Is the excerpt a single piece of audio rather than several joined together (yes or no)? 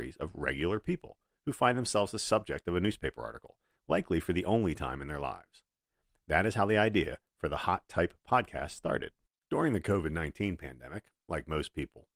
yes